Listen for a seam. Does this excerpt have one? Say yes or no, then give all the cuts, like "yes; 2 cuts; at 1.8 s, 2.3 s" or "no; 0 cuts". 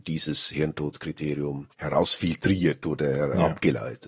yes; 1 cut; at 1.7 s